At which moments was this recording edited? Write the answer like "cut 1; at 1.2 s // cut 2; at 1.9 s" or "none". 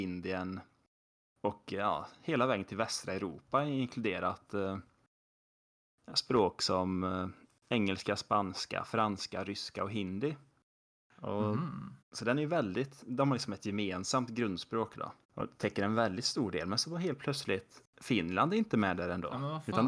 cut 1; at 12.0 s // cut 2; at 15.2 s